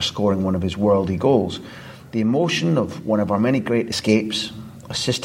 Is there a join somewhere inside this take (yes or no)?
no